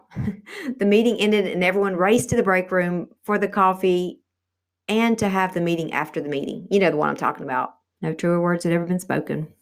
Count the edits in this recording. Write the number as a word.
two